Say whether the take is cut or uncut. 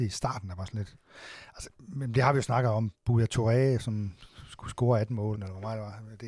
cut